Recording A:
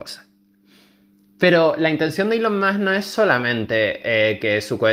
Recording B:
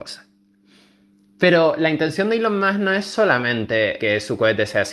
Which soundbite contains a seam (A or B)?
B